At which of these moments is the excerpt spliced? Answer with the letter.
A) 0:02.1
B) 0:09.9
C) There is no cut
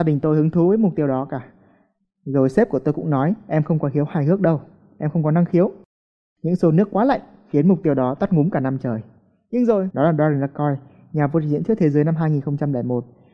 B